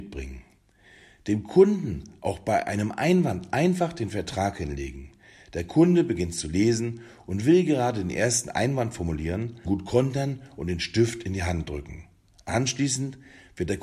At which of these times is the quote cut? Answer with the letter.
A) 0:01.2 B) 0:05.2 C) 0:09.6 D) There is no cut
C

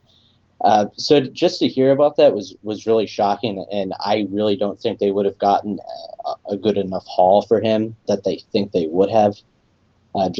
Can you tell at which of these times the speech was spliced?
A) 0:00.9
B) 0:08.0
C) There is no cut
B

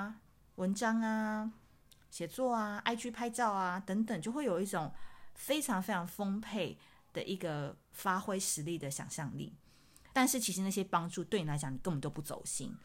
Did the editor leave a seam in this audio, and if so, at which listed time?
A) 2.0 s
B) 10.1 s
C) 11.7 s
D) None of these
B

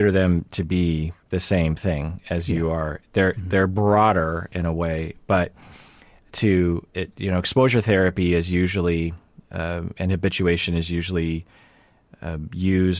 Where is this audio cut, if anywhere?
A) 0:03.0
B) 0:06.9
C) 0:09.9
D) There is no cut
B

